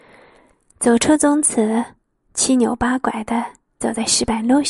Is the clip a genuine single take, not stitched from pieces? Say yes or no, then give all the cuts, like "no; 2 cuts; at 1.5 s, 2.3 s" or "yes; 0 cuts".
yes; 0 cuts